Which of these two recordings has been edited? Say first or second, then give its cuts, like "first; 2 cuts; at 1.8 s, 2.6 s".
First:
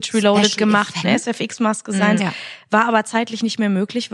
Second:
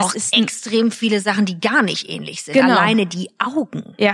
first; 2 cuts; at 1.0 s, 2.2 s